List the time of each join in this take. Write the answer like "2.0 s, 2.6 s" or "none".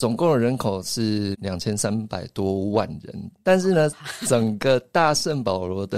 3.4 s